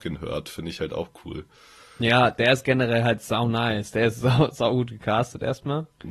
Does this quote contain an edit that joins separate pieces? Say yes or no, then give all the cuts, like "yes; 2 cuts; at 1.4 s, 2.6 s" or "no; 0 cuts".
no; 0 cuts